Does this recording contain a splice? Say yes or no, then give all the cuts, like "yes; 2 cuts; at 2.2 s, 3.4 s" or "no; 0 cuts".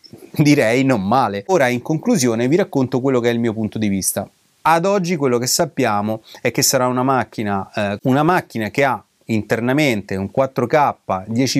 yes; 2 cuts; at 4.6 s, 8.0 s